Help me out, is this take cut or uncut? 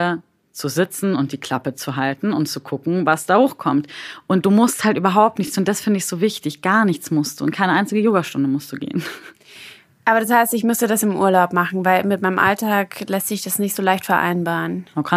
uncut